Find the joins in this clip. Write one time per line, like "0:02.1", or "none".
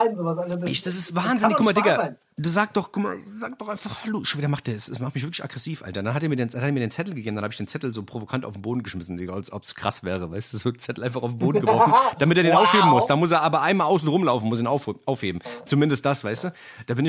none